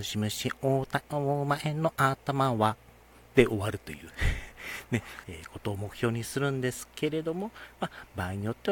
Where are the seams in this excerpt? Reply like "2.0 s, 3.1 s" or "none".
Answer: 5.2 s